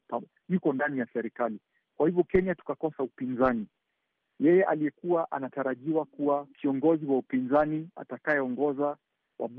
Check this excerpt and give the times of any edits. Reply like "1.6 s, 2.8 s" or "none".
4.2 s, 6.5 s